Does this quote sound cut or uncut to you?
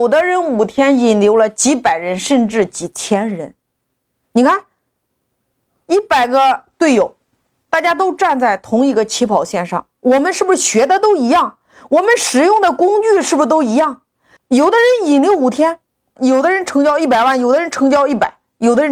cut